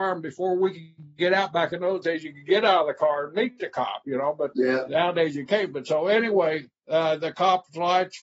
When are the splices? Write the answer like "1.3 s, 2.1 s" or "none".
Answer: 4.5 s, 6.8 s